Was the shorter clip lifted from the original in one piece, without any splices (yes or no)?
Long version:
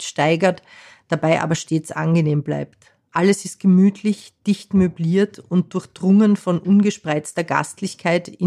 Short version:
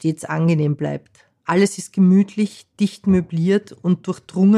yes